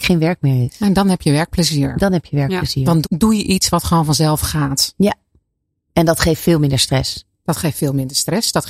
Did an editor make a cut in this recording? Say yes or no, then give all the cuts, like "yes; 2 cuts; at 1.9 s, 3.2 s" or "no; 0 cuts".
yes; 1 cut; at 3.0 s